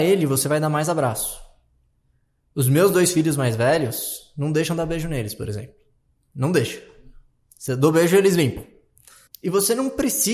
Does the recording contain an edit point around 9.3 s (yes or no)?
yes